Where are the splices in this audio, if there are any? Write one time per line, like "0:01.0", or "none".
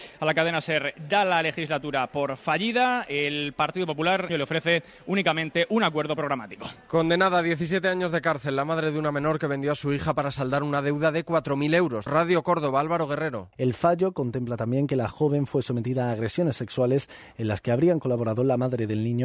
0:04.3
0:12.1
0:13.5